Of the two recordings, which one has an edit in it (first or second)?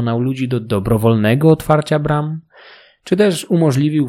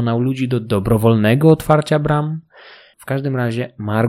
second